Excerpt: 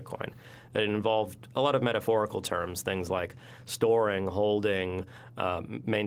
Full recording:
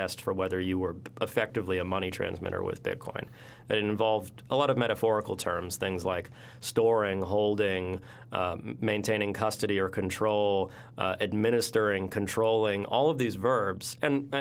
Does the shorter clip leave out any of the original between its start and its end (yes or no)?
no